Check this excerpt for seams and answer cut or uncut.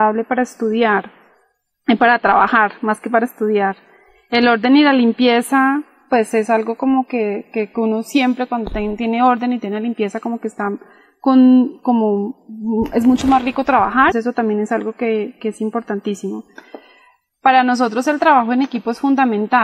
cut